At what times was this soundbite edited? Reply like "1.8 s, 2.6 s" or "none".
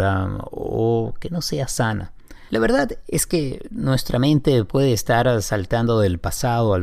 2.5 s